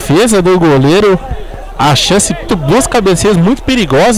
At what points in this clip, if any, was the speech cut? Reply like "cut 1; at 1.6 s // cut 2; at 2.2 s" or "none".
cut 1; at 2.5 s